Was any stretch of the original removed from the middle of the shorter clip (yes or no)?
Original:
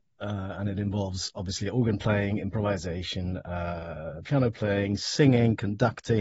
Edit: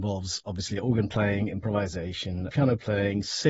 yes